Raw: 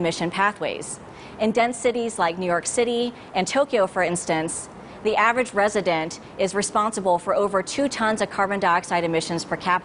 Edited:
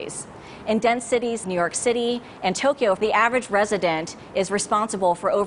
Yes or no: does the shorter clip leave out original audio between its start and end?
yes